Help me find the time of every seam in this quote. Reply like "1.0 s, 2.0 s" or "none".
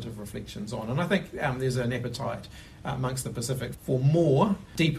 none